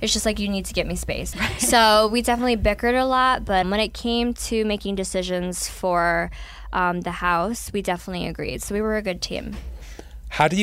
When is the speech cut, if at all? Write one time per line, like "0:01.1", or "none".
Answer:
0:01.3
0:03.6